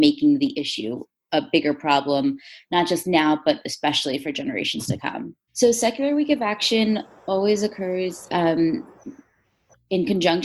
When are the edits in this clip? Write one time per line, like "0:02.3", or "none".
0:05.5